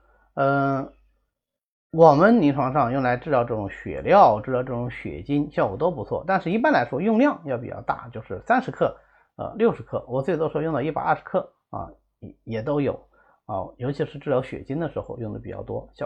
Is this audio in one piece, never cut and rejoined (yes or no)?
yes